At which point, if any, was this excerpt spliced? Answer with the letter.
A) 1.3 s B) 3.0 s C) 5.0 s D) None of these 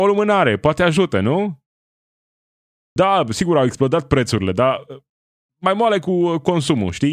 B